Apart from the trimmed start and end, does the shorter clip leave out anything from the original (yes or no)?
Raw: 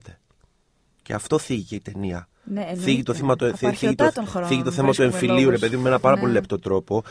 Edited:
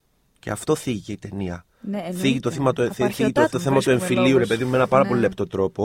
yes